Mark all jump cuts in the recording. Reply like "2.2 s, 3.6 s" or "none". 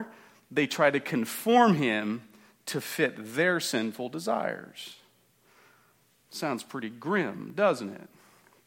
none